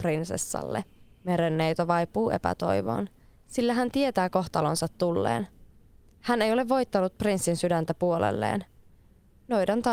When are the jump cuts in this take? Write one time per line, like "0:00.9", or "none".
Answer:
none